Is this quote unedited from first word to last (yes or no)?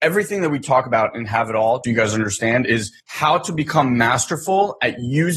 no